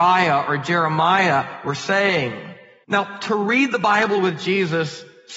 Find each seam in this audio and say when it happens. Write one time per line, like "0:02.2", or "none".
0:02.8